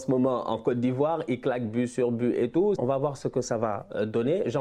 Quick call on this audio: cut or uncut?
cut